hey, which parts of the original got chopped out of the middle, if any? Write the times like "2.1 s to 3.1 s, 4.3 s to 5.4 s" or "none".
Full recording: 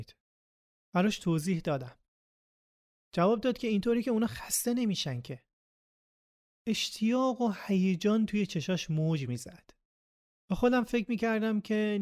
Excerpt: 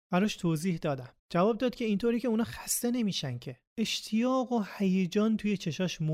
2.0 s to 3.0 s, 5.5 s to 6.6 s